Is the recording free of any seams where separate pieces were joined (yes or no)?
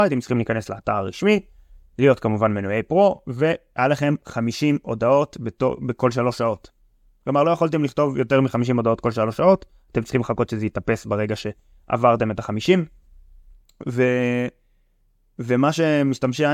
yes